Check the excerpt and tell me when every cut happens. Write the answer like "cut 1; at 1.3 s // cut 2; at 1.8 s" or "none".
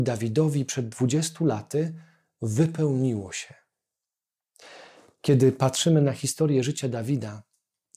none